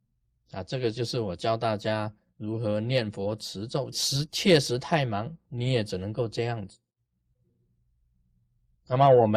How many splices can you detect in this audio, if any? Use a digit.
1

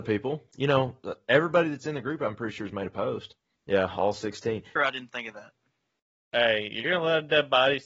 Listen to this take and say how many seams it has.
2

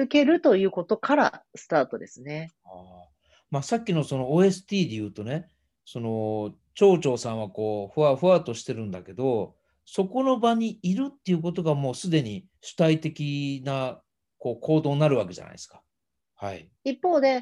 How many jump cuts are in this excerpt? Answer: 3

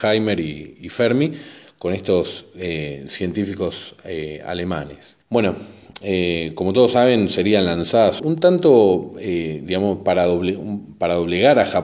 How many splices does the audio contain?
2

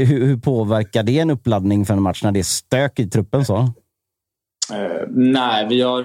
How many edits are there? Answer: 0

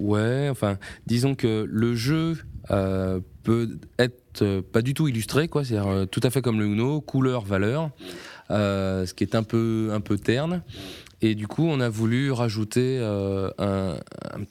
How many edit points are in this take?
0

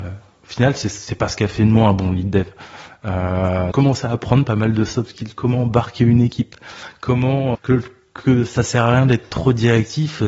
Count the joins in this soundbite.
2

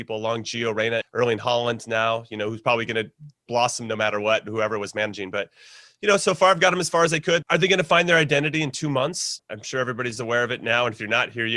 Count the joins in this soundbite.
3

